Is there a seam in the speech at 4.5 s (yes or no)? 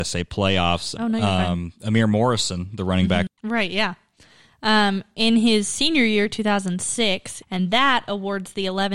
no